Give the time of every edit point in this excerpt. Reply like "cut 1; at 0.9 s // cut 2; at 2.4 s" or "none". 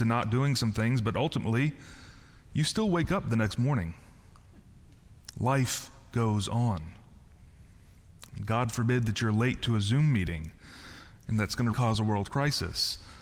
cut 1; at 11.7 s